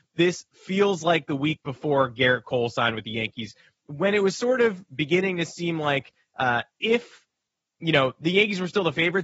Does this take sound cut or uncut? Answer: uncut